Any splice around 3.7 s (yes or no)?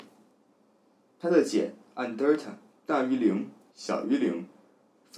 yes